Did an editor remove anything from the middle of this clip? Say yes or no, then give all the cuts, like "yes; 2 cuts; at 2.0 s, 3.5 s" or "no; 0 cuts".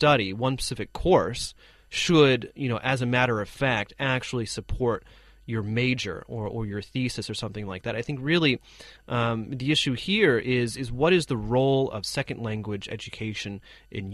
no; 0 cuts